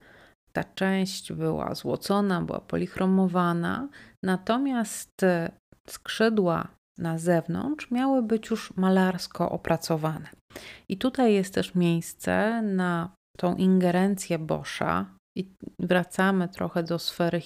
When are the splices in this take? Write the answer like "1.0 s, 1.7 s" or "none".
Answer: none

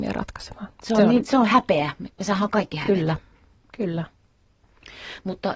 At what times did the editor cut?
none

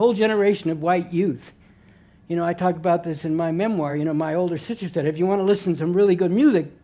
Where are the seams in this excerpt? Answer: none

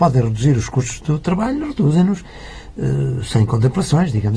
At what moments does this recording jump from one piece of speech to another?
none

